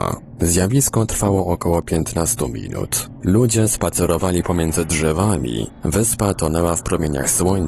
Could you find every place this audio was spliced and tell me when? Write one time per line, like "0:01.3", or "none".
0:03.2